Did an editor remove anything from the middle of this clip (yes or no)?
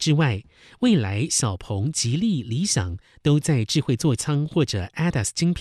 no